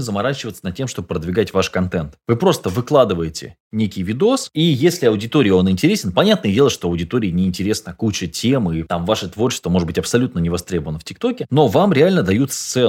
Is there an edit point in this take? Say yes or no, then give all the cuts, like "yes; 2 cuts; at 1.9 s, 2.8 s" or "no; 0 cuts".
no; 0 cuts